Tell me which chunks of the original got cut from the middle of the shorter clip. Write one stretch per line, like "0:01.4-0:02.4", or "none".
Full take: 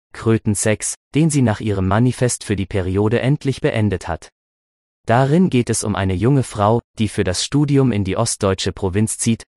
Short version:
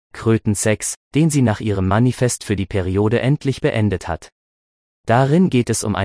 none